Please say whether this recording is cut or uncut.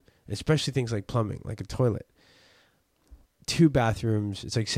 cut